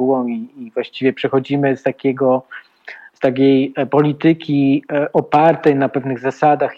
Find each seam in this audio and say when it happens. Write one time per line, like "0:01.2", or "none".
none